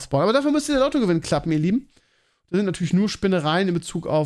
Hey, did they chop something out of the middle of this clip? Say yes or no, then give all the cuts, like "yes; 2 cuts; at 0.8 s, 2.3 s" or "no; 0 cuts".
no; 0 cuts